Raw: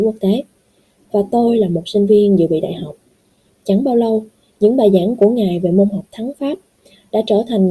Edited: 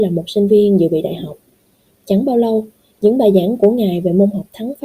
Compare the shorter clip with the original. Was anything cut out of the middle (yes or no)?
no